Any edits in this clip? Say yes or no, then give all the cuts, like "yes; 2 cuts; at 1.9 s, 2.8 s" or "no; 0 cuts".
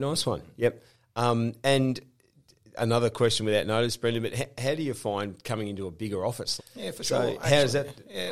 yes; 1 cut; at 6.6 s